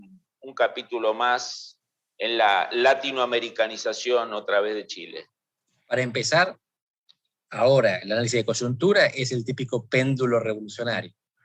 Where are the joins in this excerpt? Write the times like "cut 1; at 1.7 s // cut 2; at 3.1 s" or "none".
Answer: none